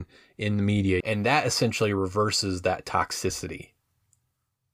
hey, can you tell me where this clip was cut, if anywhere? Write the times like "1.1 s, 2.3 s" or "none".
1.0 s